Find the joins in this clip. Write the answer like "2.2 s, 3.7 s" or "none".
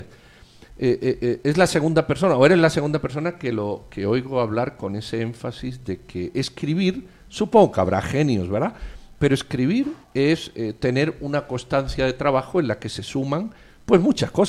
10.0 s